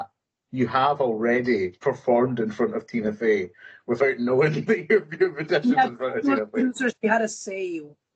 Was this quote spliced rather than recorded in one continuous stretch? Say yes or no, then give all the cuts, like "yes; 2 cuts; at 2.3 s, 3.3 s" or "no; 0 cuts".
no; 0 cuts